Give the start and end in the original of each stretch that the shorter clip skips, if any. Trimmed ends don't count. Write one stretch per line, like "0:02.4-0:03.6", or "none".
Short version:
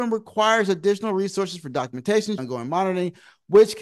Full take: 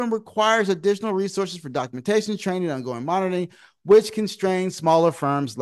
0:02.4-0:02.7